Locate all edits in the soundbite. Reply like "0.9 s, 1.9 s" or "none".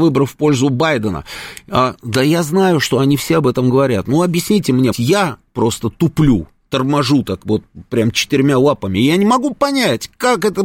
4.9 s